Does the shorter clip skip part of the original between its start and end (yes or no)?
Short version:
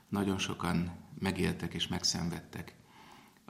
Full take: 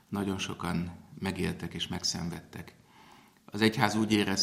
no